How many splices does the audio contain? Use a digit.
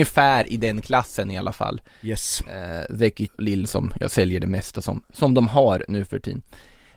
1